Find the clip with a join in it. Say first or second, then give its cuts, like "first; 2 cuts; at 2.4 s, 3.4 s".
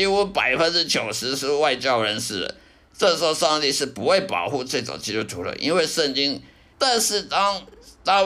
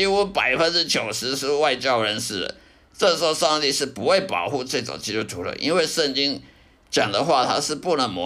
first; 1 cut; at 6.7 s